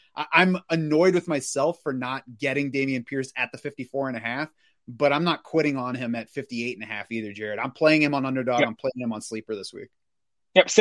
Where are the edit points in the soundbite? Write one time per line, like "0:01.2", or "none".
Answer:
none